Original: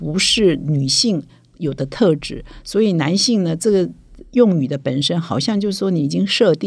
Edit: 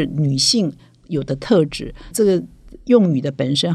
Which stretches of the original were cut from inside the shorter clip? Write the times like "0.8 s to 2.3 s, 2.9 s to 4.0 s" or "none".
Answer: 2.6 s to 3.6 s